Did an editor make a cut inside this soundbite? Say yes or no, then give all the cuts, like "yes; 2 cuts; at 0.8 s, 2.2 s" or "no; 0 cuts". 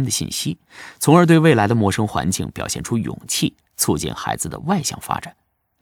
no; 0 cuts